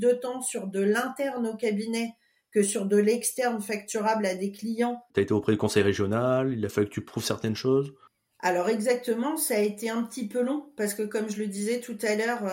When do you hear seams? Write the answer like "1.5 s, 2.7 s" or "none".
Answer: 5.1 s